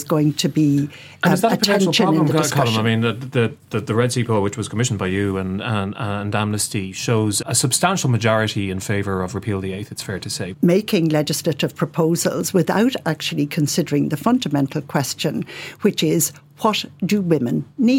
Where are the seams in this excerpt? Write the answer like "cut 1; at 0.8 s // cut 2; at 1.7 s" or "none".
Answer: cut 1; at 7.4 s // cut 2; at 10.5 s